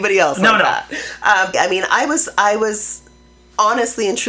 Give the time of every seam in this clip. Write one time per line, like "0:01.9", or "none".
0:01.5